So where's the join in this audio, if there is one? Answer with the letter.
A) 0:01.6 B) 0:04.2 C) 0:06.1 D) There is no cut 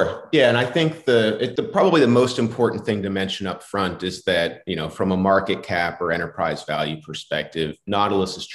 A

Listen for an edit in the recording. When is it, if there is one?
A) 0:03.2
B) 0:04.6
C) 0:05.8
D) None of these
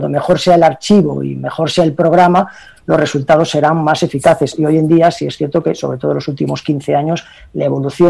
D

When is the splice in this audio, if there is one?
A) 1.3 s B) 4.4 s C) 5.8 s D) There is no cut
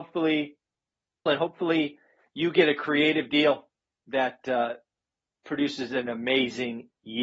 A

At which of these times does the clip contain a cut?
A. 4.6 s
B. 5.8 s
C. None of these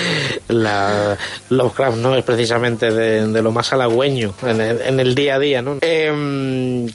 B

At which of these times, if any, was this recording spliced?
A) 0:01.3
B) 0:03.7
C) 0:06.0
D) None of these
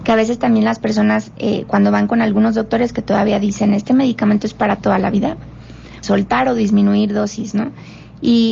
C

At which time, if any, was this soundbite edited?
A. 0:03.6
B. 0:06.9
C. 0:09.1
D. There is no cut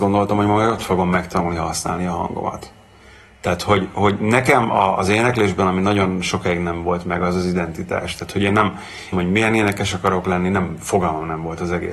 C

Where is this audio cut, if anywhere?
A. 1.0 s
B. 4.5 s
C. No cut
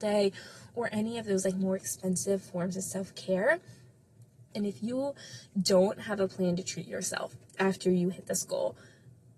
B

